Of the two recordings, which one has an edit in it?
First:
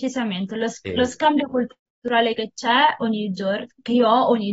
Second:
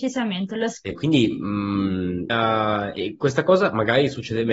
second; 2 cuts; at 0.9 s, 2.3 s

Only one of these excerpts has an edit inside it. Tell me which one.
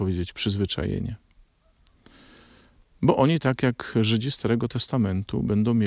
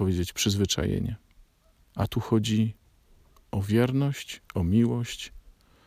second; 1 cut; at 1.8 s

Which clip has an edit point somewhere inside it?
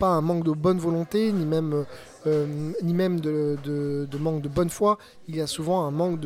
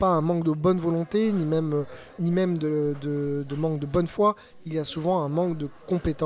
second; 1 cut; at 2.2 s

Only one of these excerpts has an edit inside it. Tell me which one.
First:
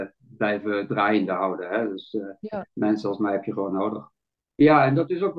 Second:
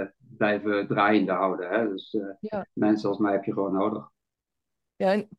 first; 1 cut; at 4.5 s

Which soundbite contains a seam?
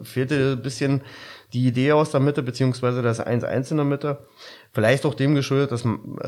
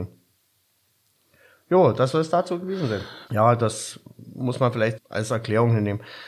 second; 2 cuts; at 3.3 s, 5.0 s

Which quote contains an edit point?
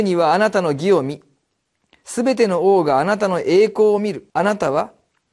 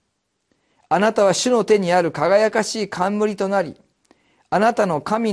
first; 1 cut; at 4.3 s

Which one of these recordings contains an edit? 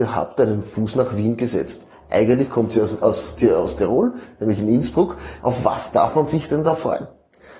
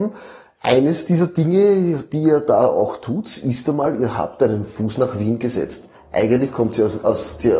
first; 1 cut; at 5.4 s

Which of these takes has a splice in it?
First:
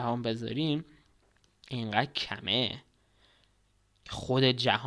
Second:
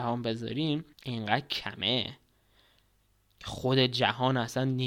second; 1 cut; at 0.9 s

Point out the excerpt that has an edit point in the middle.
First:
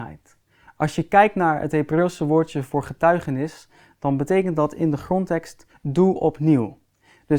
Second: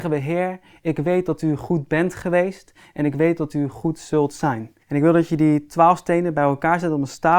second; 1 cut; at 4.8 s

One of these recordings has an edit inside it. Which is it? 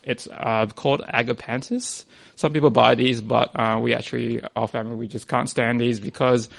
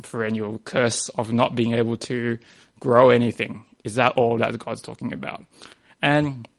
first; 1 cut; at 4.6 s

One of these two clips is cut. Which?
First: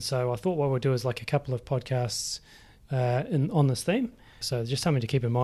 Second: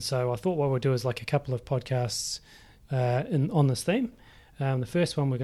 first; 1 cut; at 4.4 s

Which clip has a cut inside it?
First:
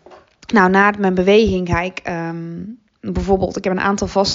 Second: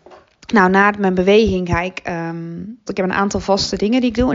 second; 1 cut; at 2.9 s

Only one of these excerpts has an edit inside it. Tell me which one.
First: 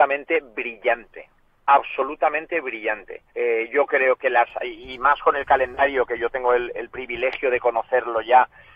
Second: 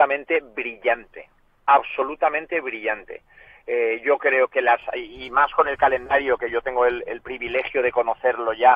first; 1 cut; at 3.3 s

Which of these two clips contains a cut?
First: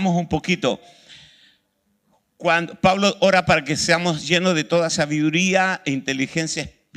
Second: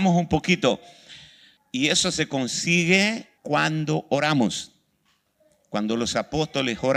second; 2 cuts; at 1.6 s, 3.4 s

